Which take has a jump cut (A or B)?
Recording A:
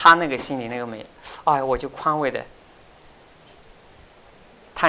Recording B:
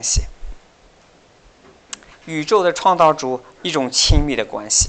B